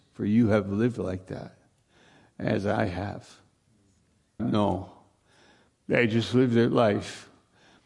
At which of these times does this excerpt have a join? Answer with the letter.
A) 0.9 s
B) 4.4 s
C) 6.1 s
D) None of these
B